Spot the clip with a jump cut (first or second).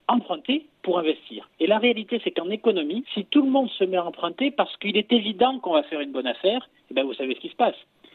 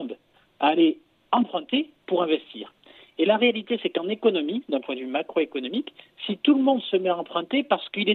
first